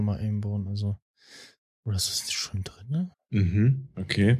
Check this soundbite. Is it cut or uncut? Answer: cut